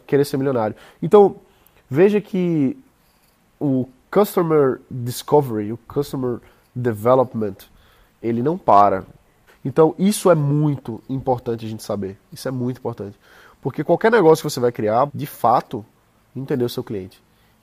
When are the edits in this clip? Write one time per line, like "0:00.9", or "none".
0:09.5
0:15.1